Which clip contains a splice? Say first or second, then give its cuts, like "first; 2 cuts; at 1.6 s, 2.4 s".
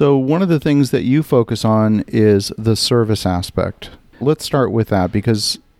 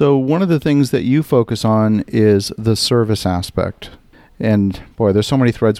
first; 1 cut; at 4.2 s